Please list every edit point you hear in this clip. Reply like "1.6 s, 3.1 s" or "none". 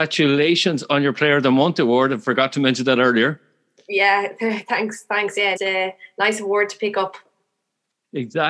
5.6 s